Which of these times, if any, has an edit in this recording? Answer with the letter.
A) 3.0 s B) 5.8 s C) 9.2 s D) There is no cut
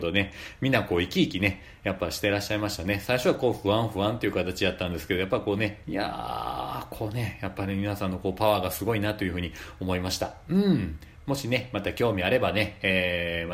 B